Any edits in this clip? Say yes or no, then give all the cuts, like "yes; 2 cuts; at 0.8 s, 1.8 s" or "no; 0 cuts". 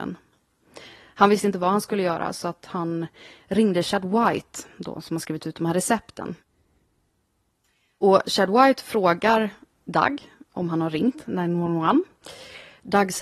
no; 0 cuts